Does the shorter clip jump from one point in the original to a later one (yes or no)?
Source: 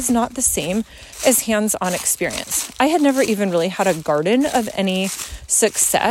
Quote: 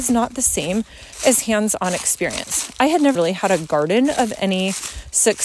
yes